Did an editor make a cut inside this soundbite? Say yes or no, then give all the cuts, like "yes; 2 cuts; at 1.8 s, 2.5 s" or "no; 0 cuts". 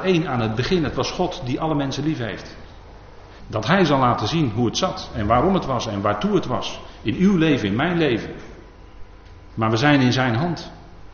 yes; 2 cuts; at 3.4 s, 9.5 s